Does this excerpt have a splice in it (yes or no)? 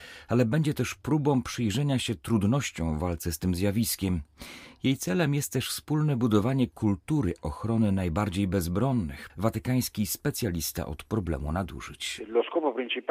yes